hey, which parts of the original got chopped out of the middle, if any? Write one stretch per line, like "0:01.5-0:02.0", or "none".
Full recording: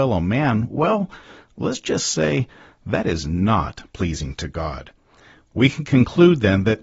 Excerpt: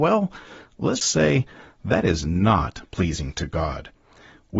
0:01.8-0:02.0